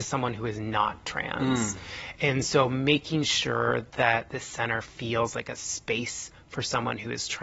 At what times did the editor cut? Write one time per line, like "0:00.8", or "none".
none